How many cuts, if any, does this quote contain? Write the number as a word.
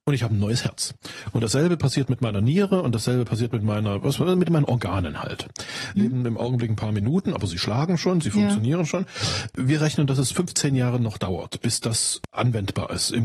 one